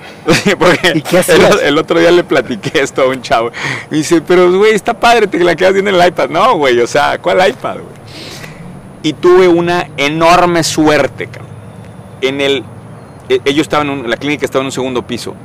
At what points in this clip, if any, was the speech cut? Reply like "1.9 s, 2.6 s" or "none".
none